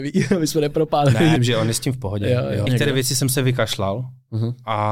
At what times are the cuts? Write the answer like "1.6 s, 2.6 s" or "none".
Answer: 1.4 s, 2.7 s

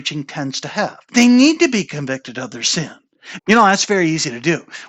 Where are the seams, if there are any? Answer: 1.1 s, 3.4 s

